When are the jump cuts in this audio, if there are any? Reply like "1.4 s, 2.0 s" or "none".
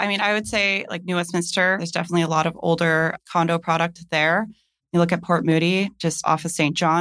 none

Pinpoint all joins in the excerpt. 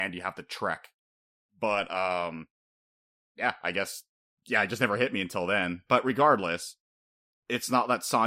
none

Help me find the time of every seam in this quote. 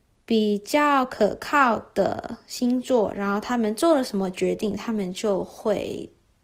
none

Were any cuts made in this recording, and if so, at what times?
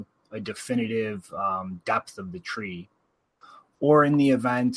none

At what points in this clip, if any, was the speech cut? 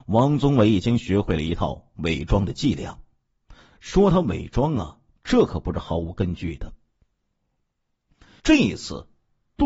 8.4 s

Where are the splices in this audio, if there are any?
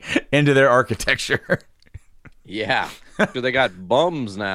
3.3 s

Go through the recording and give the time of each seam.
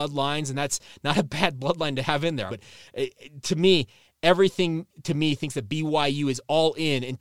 2.5 s

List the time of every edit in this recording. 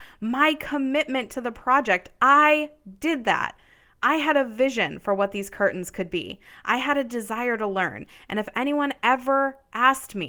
none

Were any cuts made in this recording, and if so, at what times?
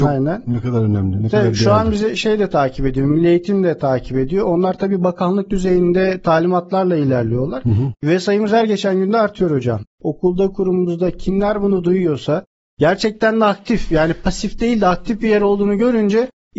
7.9 s

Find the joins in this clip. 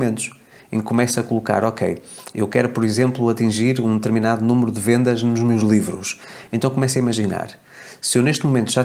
none

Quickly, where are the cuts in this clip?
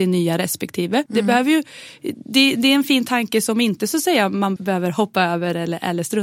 1.1 s, 4.6 s

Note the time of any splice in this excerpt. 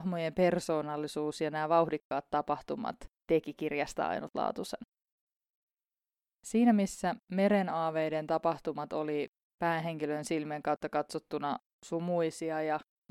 none

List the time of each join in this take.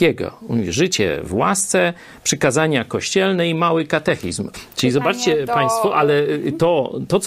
4.5 s

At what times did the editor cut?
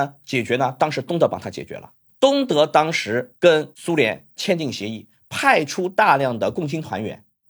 none

